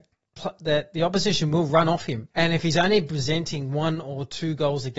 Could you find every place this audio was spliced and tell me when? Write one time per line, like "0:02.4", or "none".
0:02.3